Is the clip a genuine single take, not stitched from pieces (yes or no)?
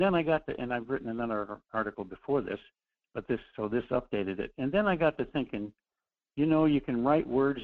yes